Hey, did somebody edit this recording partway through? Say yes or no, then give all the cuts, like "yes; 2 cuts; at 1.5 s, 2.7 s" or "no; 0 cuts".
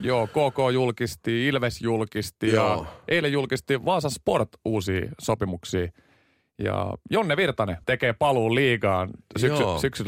yes; 1 cut; at 7.8 s